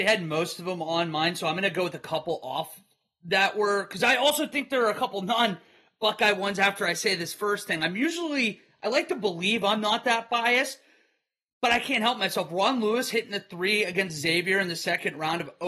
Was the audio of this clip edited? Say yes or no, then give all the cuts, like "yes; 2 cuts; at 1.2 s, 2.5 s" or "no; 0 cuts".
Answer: no; 0 cuts